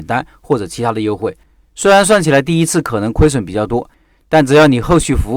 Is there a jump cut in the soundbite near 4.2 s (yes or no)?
no